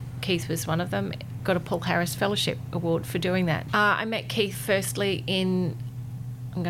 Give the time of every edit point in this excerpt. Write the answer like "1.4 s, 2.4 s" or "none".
1.4 s, 3.7 s

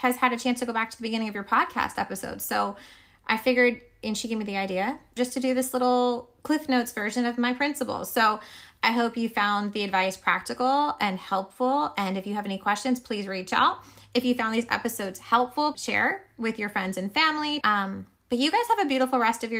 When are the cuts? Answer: 5.2 s, 15.7 s, 17.6 s

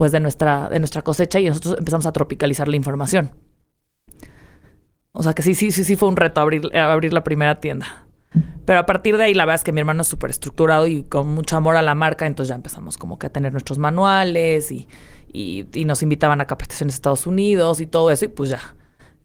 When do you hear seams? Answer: none

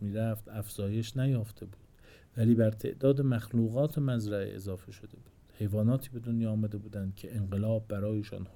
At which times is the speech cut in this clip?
none

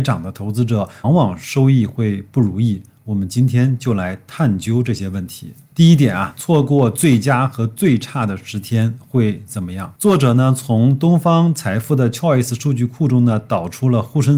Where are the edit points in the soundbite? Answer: 1.0 s

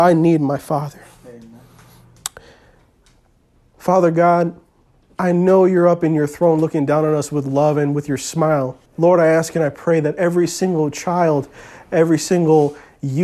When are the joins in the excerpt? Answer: 8.9 s

